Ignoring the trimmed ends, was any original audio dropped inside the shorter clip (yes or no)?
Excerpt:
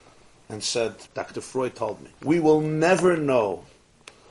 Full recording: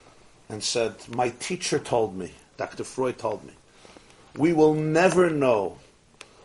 yes